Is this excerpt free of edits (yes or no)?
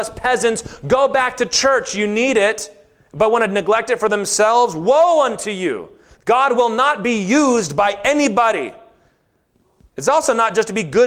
yes